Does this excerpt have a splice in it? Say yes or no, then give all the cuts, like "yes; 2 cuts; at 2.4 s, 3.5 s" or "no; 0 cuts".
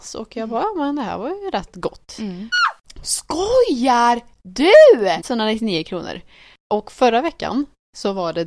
yes; 2 cuts; at 2.5 s, 5.2 s